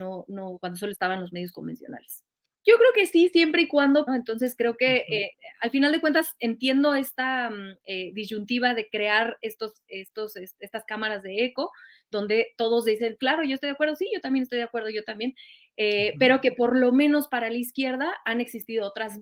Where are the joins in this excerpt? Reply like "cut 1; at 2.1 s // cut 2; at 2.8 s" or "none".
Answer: cut 1; at 2.5 s // cut 2; at 4.1 s // cut 3; at 5.3 s

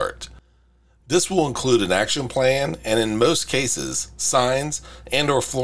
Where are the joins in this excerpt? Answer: cut 1; at 1.0 s

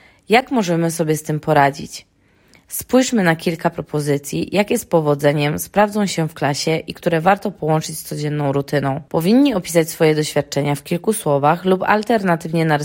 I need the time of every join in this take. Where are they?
cut 1; at 2.6 s // cut 2; at 9.1 s

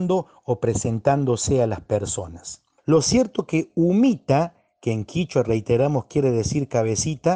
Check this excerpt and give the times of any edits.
cut 1; at 2.8 s

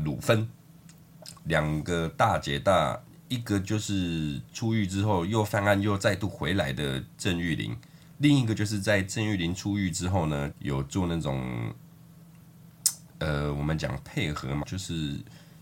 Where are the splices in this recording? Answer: cut 1; at 1.4 s // cut 2; at 10.5 s // cut 3; at 14.6 s

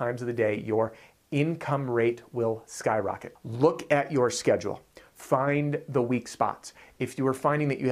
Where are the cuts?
cut 1; at 3.3 s

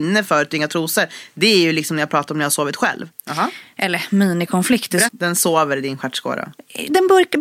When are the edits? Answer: cut 1; at 3.1 s // cut 2; at 5.1 s

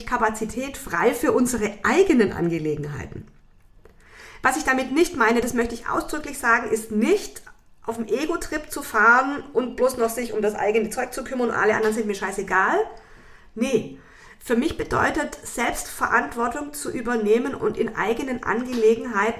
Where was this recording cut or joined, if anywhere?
none

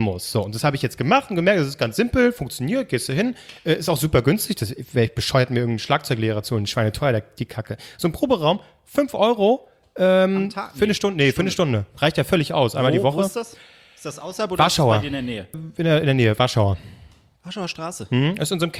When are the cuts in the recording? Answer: cut 1; at 15.5 s

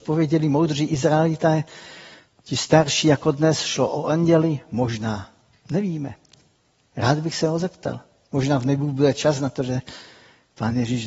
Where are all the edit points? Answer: none

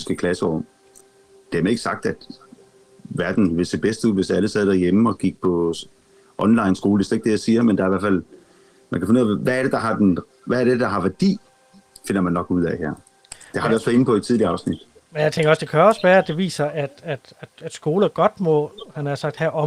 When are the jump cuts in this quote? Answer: none

